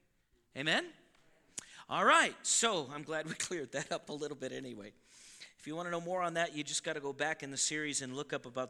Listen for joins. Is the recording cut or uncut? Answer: uncut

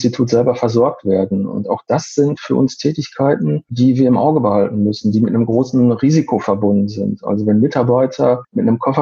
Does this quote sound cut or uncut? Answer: uncut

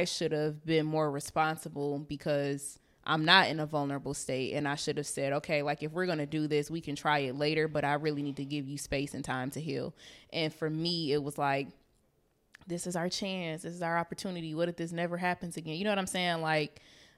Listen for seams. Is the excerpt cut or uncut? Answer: uncut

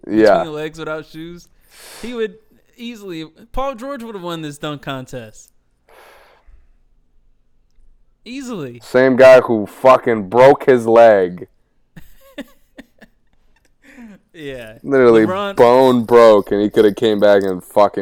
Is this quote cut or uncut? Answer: uncut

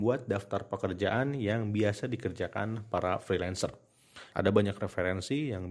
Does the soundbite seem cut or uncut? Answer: cut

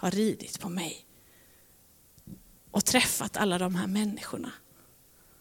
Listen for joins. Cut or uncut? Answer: uncut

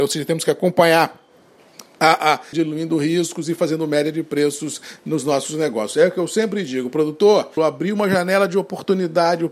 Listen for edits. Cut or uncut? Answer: cut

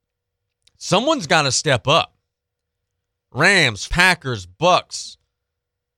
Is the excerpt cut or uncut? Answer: cut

